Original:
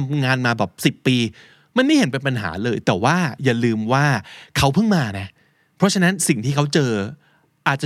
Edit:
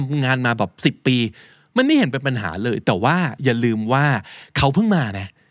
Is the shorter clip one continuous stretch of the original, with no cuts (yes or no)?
yes